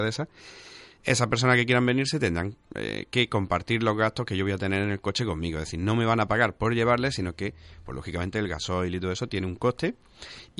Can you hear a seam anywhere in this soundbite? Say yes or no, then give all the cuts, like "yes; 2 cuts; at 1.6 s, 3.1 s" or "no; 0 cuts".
yes; 1 cut; at 1.0 s